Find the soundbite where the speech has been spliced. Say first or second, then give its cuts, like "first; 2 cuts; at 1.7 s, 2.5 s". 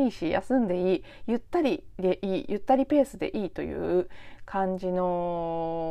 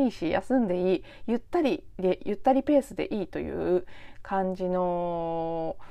second; 1 cut; at 2.2 s